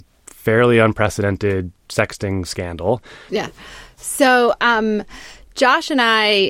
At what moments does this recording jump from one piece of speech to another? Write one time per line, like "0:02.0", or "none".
0:03.3